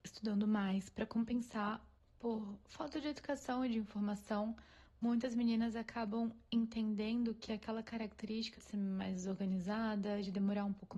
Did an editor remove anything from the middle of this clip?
yes; 1 cut; at 8.6 s

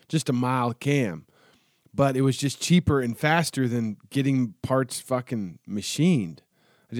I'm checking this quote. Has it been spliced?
no; 0 cuts

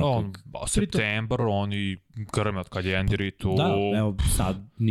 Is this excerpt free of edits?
yes; 0 cuts

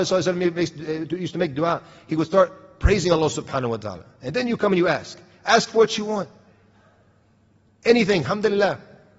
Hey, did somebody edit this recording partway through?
no; 0 cuts

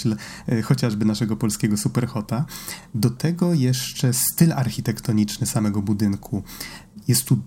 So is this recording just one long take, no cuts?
yes; 0 cuts

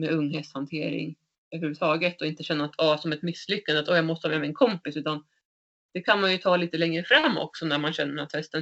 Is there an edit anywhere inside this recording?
no; 0 cuts

